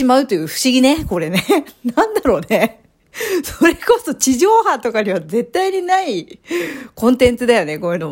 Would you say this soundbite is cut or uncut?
uncut